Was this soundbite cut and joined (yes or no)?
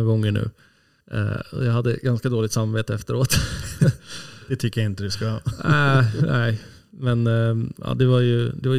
yes